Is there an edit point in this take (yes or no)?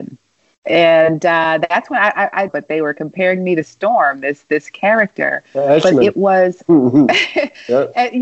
yes